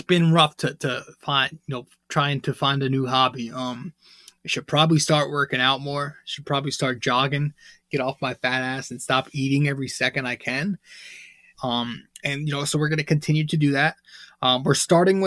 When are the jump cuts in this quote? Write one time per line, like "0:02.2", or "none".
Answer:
0:11.5